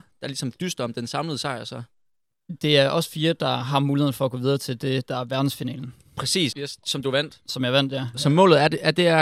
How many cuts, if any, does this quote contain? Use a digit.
2